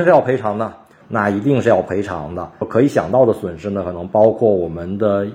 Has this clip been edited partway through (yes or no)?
yes